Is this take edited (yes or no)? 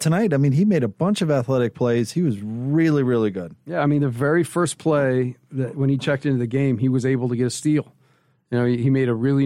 no